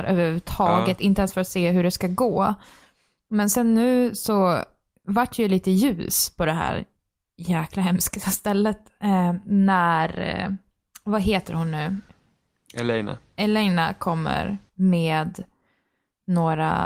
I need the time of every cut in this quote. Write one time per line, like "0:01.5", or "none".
none